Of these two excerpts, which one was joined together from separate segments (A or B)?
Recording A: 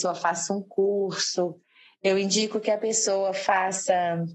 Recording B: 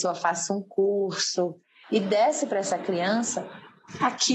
B